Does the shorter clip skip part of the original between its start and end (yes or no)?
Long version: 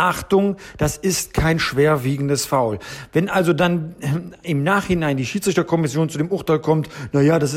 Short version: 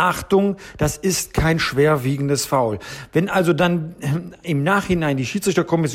no